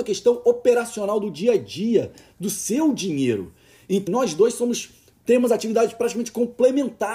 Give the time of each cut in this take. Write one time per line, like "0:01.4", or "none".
0:04.1

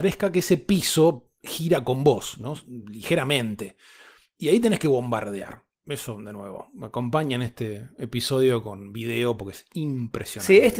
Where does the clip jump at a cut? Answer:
none

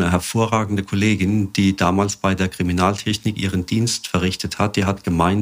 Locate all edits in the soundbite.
none

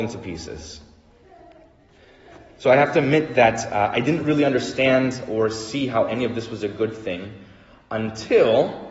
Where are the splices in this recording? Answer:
none

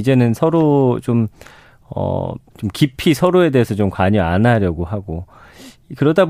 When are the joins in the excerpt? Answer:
0:02.5

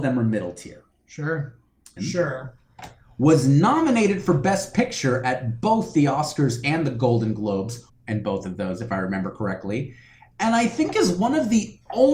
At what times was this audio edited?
0:02.0
0:07.9

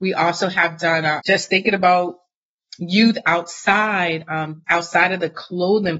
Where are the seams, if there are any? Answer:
0:01.2
0:04.7

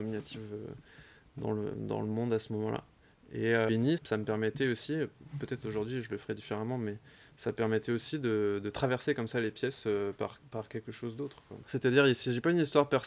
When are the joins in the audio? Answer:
0:04.0
0:11.6

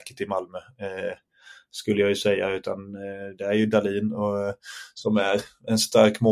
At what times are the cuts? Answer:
none

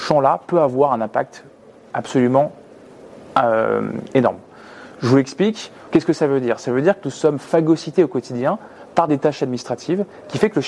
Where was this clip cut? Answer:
0:05.9

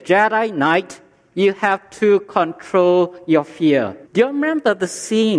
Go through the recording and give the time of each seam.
0:04.1

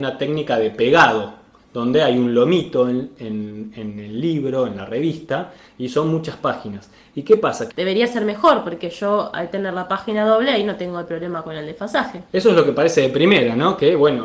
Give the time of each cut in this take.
0:07.7
0:12.3

